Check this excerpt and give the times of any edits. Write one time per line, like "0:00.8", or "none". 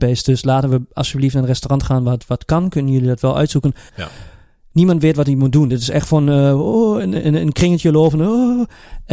0:03.9
0:07.2